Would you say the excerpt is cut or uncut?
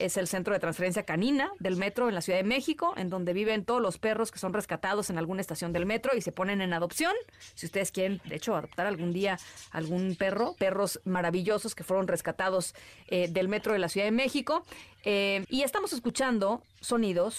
cut